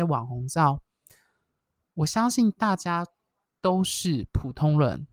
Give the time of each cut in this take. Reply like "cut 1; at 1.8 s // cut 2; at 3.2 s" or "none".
none